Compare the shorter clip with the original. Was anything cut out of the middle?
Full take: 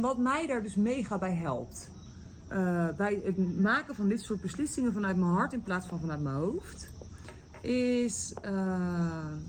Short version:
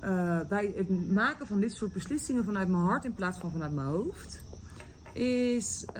no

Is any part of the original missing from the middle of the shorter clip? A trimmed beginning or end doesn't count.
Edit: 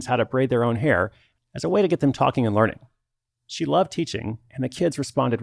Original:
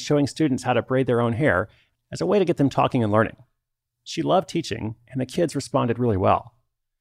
no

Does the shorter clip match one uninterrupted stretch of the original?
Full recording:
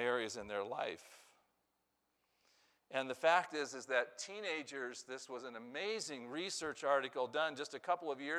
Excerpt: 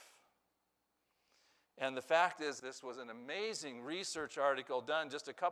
no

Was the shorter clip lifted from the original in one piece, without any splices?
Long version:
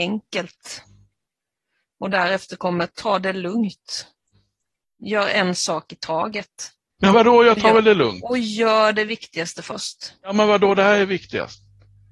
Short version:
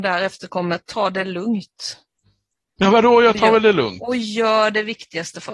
no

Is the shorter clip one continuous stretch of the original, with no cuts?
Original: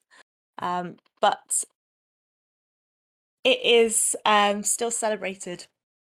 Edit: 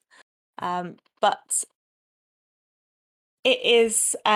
yes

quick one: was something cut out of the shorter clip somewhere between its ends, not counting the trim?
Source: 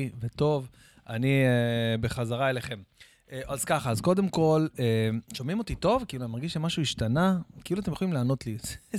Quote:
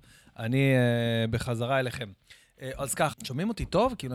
yes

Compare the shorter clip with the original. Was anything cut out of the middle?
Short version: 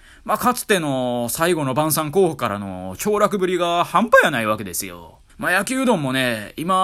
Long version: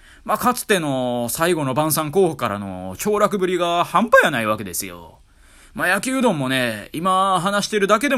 yes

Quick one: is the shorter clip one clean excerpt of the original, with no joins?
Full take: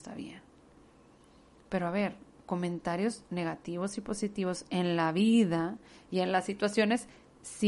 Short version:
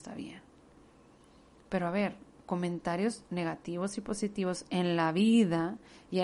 yes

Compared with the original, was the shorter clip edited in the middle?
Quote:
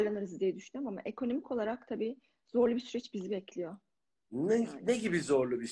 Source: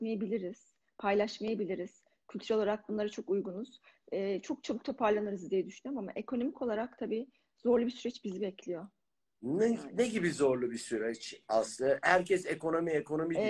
no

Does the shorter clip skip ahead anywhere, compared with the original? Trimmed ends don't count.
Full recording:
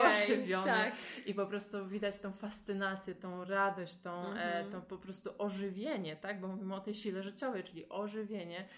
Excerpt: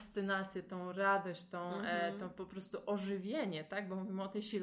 no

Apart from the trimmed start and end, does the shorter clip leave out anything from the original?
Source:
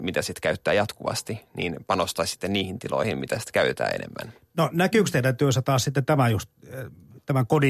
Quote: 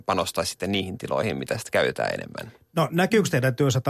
no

